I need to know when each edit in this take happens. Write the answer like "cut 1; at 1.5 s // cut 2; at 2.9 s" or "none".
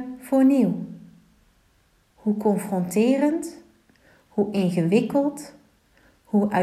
cut 1; at 2.1 s